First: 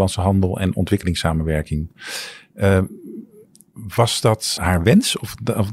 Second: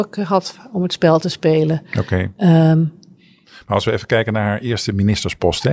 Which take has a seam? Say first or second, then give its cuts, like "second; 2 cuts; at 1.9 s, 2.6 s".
first; 1 cut; at 4.6 s